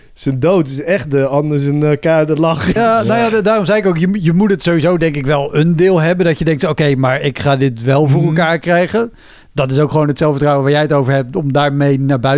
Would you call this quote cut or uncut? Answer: cut